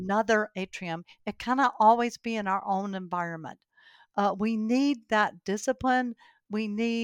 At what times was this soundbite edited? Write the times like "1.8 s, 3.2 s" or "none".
none